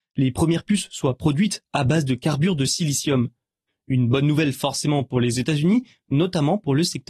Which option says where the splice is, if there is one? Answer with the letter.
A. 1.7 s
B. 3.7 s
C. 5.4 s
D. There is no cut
B